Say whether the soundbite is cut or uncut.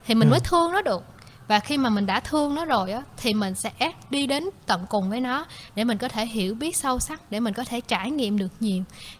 uncut